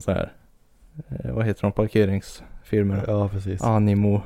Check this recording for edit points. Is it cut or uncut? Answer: uncut